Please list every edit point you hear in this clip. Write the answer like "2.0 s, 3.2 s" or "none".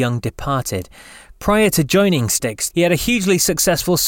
2.7 s